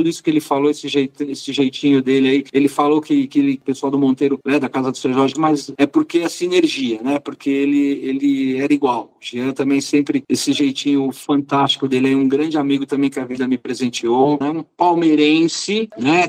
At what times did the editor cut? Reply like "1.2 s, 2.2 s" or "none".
5.3 s, 14.4 s